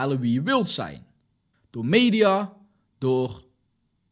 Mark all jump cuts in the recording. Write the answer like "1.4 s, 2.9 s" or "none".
1.5 s